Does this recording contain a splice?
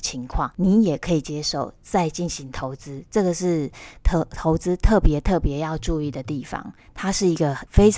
no; 0 cuts

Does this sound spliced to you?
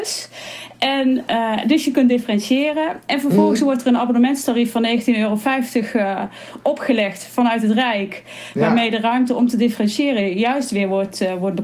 no; 0 cuts

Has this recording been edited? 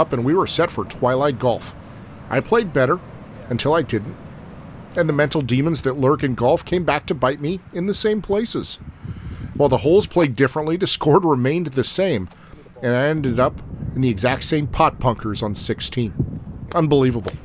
no; 0 cuts

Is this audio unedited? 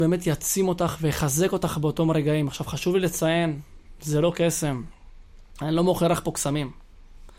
yes; 0 cuts

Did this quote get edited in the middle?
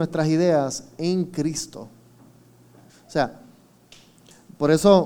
yes; 1 cut; at 2.9 s

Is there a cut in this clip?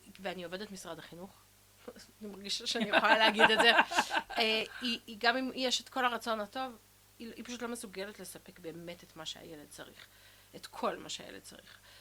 no; 0 cuts

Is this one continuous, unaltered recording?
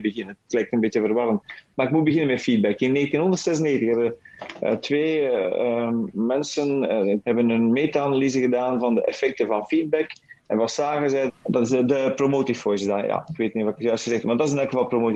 no; 2 cuts; at 7.2 s, 11.3 s

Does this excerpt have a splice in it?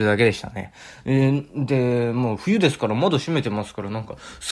yes; 1 cut; at 1.0 s

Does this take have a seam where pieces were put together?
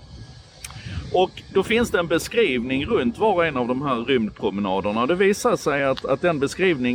no; 0 cuts

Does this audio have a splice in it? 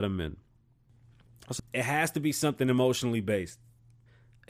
yes; 1 cut; at 1.6 s

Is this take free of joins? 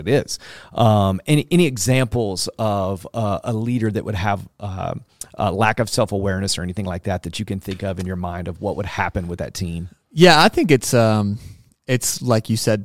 yes; 0 cuts

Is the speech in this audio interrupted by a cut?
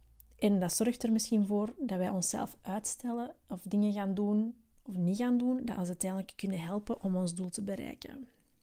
no; 0 cuts

